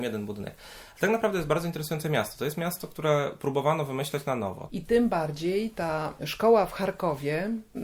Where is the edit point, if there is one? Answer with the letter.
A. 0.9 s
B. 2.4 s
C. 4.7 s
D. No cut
C